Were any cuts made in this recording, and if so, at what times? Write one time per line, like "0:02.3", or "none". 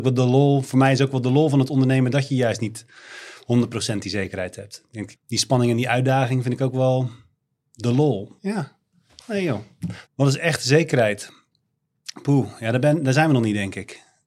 0:05.2
0:08.4
0:10.1